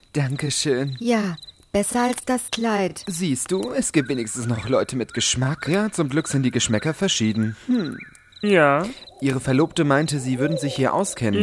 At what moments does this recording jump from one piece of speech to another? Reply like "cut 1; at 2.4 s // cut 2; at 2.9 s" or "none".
cut 1; at 8.4 s